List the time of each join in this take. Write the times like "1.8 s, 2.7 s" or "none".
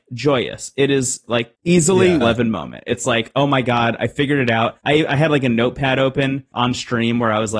2.2 s

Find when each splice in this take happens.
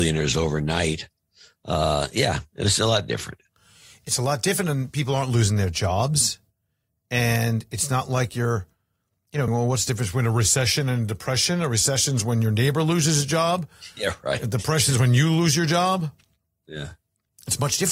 9.5 s

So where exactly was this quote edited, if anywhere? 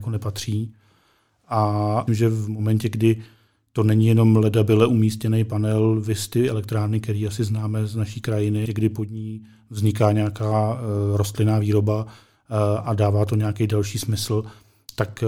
2.1 s, 8.7 s

